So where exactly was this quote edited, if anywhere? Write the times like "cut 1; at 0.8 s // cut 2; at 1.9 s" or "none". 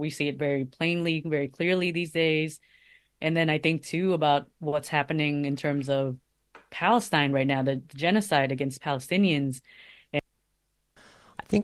none